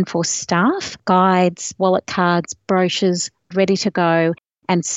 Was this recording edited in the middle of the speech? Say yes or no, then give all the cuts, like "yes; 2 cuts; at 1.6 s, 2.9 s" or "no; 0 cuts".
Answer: yes; 2 cuts; at 1.8 s, 3.5 s